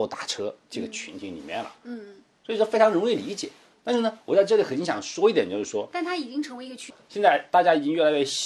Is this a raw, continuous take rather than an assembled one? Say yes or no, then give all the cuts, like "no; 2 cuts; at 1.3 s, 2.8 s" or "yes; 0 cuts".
yes; 0 cuts